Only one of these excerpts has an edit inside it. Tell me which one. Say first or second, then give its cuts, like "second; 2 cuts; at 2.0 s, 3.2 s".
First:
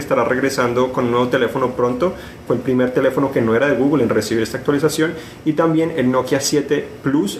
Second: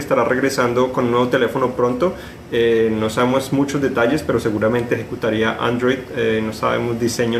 first; 1 cut; at 2.5 s